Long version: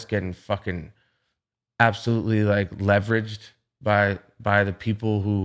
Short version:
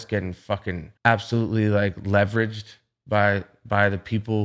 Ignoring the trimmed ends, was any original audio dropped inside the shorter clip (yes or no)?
yes